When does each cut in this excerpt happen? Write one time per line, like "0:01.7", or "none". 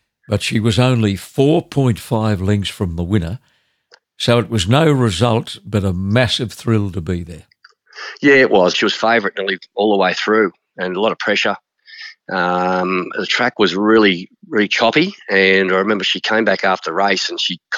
0:08.7